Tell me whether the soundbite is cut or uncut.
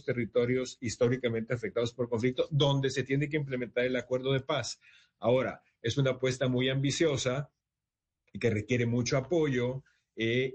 uncut